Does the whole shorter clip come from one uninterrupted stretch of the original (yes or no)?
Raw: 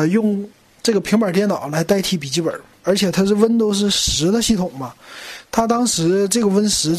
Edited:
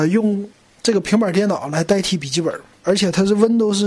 yes